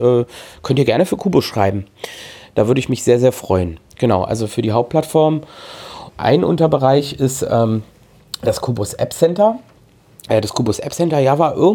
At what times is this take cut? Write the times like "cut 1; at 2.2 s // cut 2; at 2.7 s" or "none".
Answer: cut 1; at 6.2 s

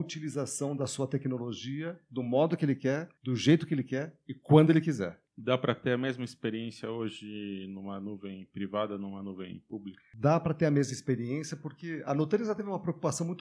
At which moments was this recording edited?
none

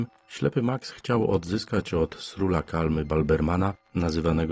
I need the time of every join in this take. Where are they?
none

